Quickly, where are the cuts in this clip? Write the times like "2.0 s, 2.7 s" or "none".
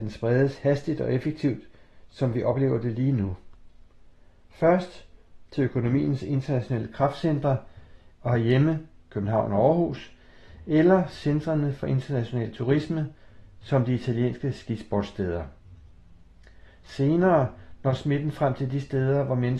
8.1 s